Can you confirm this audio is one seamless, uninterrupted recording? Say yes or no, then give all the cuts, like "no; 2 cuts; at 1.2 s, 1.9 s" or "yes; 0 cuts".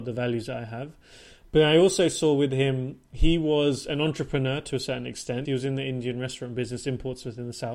no; 1 cut; at 5.5 s